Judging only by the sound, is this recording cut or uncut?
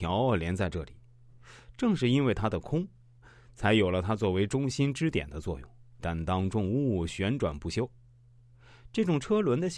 cut